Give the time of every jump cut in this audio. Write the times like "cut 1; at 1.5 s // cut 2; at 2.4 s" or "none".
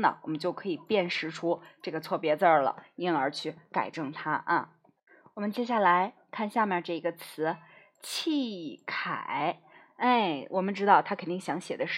none